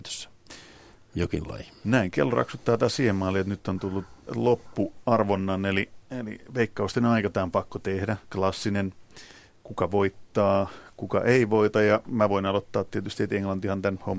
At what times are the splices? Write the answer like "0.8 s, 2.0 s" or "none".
none